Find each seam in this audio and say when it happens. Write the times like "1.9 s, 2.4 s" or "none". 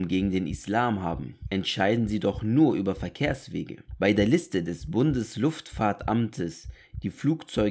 none